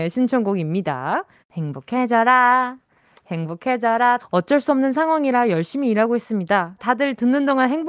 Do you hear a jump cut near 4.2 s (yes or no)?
yes